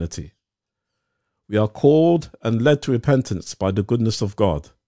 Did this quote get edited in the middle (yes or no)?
no